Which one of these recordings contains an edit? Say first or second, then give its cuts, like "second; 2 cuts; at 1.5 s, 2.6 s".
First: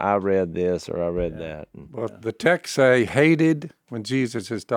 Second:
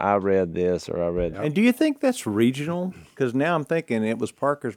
second; 1 cut; at 1.3 s